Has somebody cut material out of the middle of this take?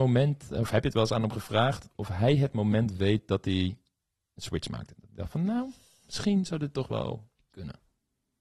no; 0 cuts

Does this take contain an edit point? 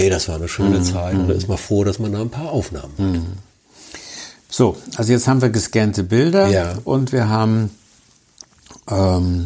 no; 0 cuts

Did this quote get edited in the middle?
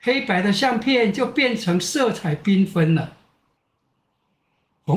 no; 0 cuts

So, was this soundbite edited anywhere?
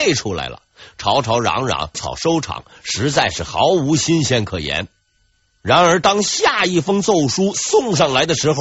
yes; 1 cut; at 1.9 s

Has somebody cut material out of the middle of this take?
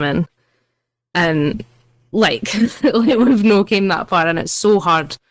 yes; 1 cut; at 2.8 s

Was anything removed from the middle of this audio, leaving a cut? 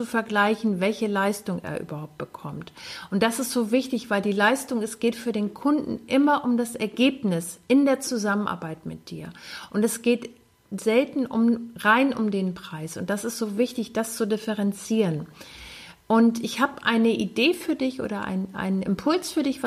no; 0 cuts

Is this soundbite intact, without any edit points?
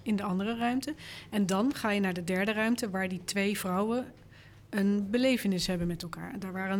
yes; 0 cuts

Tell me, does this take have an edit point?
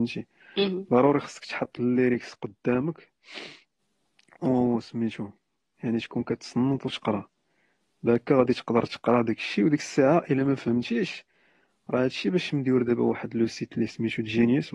no; 0 cuts

